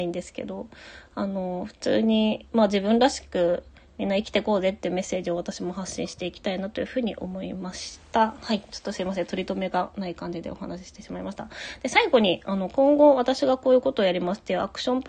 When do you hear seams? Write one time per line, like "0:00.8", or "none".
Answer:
none